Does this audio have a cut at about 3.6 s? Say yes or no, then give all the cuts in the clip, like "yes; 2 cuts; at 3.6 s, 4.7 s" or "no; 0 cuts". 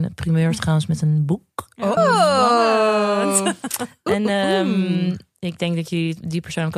no; 1 cut; at 2.0 s